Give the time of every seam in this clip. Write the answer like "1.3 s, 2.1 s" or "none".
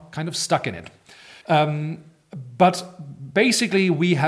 1.4 s